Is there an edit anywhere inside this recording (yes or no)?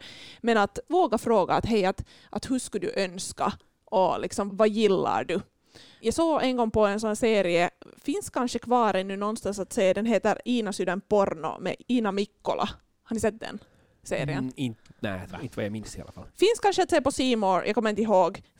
no